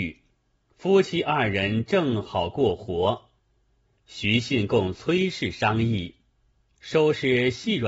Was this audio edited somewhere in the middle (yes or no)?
yes